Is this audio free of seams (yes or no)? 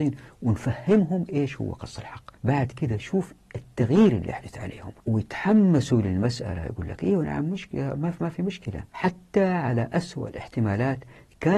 no